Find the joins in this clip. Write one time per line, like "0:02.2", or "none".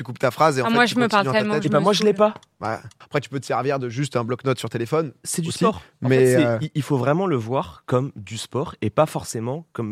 0:03.0